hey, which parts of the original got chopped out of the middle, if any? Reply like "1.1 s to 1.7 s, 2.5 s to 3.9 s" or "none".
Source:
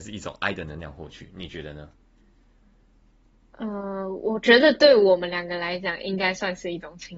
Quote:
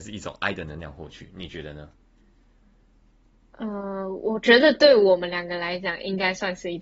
none